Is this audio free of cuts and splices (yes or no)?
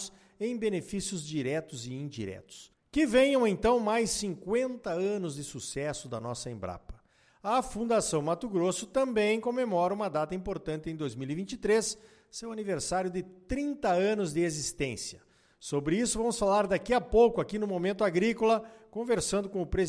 yes